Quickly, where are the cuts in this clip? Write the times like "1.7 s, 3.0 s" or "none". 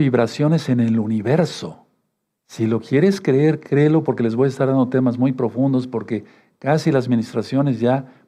none